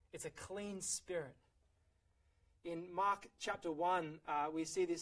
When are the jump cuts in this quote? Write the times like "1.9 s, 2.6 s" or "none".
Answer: none